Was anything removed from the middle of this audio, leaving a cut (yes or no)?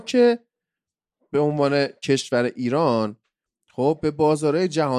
no